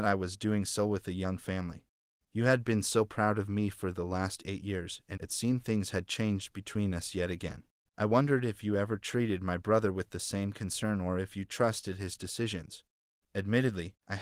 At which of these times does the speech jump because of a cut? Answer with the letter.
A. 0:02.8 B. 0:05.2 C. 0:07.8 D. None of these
B